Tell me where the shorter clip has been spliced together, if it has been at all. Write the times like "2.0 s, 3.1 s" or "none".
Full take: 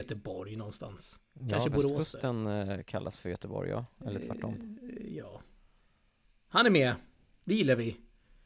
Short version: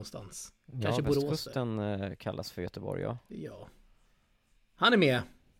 3.3 s